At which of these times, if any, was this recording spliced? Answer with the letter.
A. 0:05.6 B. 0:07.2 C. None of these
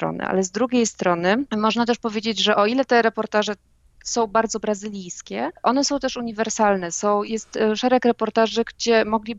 B